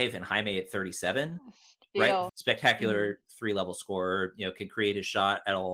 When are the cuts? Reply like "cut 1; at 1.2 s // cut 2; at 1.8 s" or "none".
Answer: cut 1; at 2.3 s